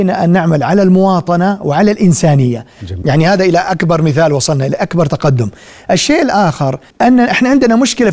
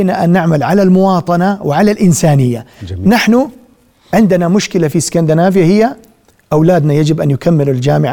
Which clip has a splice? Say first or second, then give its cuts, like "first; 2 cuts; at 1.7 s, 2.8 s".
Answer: first; 2 cuts; at 3.0 s, 6.9 s